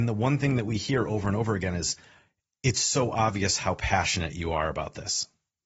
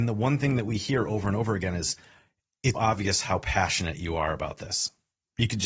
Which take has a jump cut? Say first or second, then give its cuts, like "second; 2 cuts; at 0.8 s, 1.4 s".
second; 1 cut; at 2.7 s